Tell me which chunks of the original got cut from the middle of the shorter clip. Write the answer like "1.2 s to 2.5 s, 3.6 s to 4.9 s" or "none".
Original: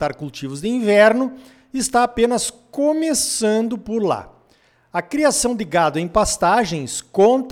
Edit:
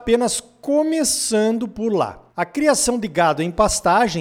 4.4 s to 4.9 s